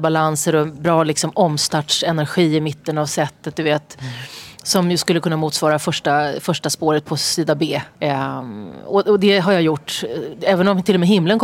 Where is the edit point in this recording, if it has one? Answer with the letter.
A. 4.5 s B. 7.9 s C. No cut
B